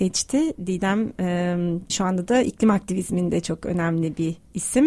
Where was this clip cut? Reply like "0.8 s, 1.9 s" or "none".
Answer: 1.9 s